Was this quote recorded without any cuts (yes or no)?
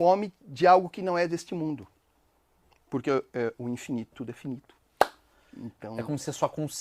no